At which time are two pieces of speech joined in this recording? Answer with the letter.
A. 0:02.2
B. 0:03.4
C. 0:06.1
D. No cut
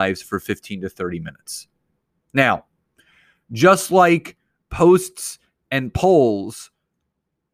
D